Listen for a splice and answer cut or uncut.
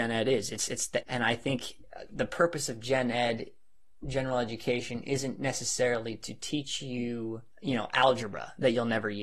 cut